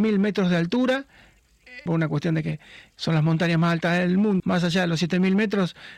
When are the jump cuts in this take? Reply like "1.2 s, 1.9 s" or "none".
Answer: 1.9 s, 4.4 s